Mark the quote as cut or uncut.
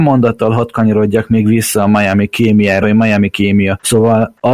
cut